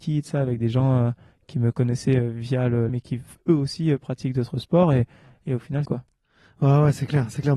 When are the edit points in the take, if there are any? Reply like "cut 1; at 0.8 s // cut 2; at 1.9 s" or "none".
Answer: cut 1; at 2.9 s // cut 2; at 5.9 s

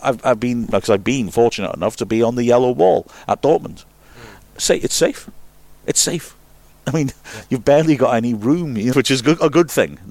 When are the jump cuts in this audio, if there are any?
cut 1; at 8.9 s

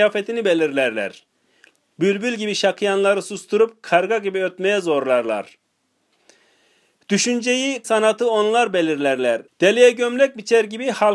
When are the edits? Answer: cut 1; at 7.8 s // cut 2; at 9.5 s

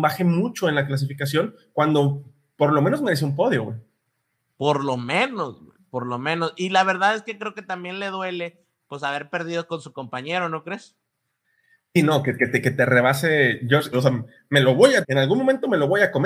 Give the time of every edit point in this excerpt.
cut 1; at 13.9 s // cut 2; at 15.0 s

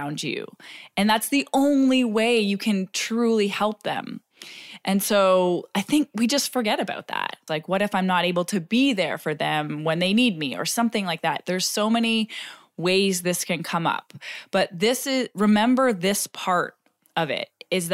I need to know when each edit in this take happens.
cut 1; at 7.5 s

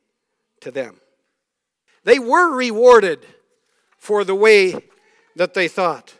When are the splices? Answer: cut 1; at 1.9 s

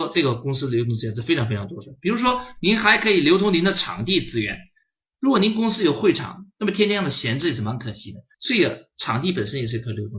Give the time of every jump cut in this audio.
cut 1; at 8.3 s

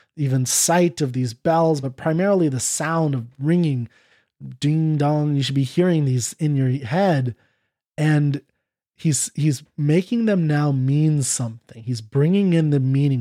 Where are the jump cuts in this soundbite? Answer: none

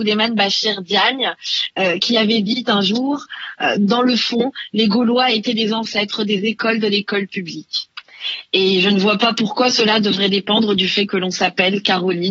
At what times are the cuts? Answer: none

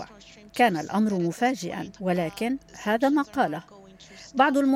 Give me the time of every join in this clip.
cut 1; at 2.0 s

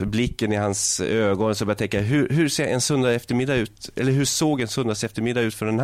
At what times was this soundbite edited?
none

